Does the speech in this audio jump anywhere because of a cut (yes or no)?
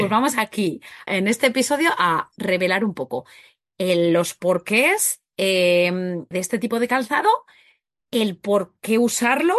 yes